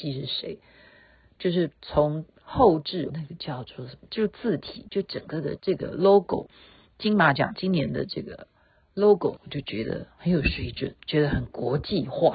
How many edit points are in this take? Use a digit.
3